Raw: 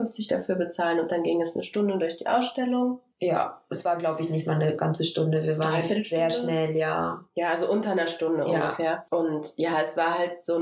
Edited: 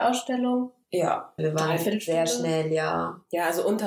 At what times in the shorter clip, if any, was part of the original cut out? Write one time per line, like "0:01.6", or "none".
0:01.4